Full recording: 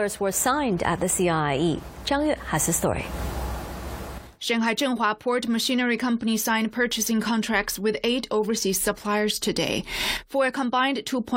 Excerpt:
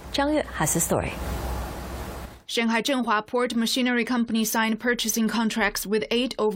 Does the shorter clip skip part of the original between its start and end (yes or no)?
no